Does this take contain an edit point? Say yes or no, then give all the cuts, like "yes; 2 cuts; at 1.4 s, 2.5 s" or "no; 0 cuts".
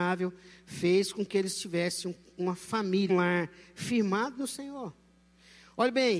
yes; 1 cut; at 3.1 s